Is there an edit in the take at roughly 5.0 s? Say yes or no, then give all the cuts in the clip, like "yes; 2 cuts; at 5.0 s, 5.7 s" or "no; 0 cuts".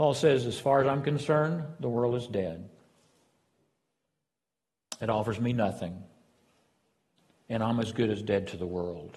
no; 0 cuts